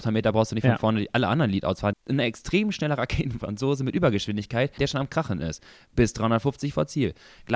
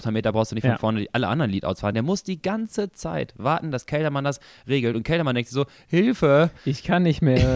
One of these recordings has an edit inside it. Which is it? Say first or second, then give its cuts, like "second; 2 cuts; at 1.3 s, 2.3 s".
first; 2 cuts; at 1.9 s, 4.8 s